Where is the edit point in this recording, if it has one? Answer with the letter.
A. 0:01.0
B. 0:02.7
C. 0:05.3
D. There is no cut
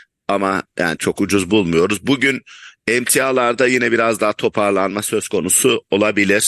A